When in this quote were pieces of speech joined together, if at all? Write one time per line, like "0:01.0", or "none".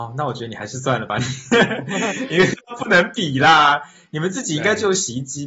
none